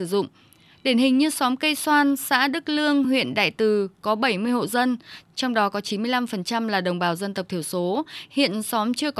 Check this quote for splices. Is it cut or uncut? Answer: uncut